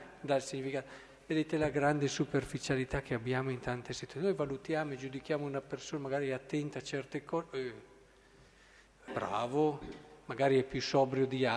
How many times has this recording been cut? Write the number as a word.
one